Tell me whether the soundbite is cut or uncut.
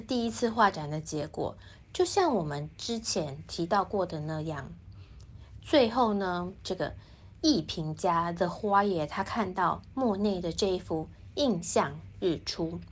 uncut